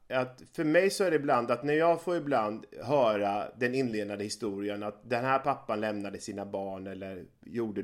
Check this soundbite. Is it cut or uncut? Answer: uncut